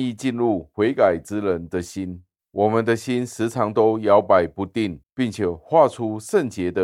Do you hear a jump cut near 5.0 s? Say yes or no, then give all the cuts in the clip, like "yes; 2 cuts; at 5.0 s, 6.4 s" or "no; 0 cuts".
yes; 2 cuts; at 2.4 s, 5.0 s